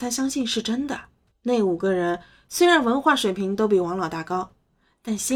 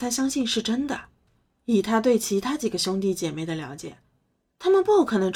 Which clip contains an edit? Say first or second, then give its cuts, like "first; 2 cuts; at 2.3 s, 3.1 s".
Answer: first; 1 cut; at 1.3 s